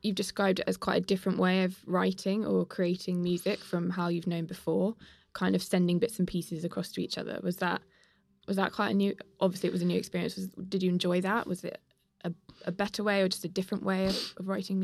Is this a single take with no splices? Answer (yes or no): yes